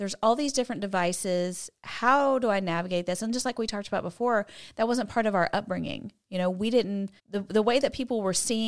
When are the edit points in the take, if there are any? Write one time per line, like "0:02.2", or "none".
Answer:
0:07.2